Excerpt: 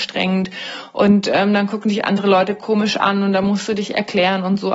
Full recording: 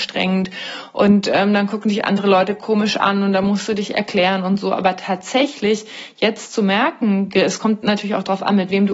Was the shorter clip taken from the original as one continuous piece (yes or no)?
yes